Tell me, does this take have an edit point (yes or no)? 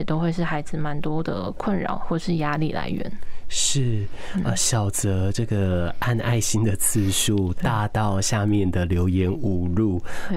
no